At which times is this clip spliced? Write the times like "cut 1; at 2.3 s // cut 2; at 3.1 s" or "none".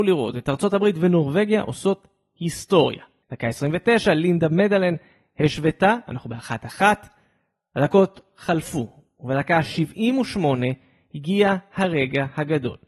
cut 1; at 3.2 s